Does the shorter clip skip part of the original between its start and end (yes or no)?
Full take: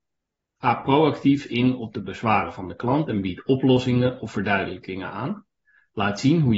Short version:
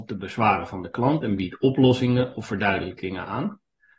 no